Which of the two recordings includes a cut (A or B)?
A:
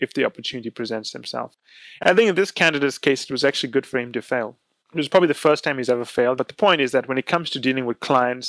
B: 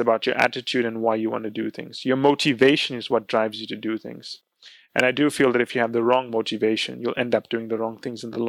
A